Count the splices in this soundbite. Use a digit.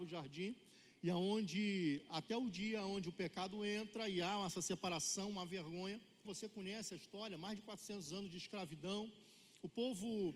1